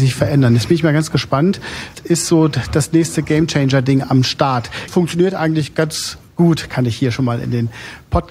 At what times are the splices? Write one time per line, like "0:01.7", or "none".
0:01.9
0:04.9